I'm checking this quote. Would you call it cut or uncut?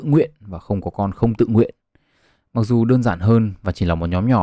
uncut